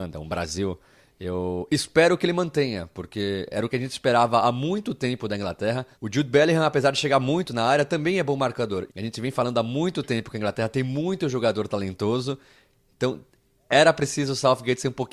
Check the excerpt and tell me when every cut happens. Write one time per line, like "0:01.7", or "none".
0:05.9
0:08.9